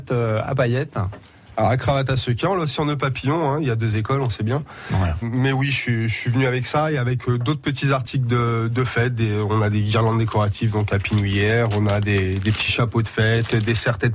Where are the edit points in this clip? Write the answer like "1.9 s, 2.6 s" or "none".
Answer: 5.2 s